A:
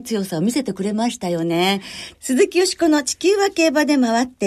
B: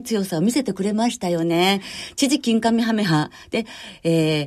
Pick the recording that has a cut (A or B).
A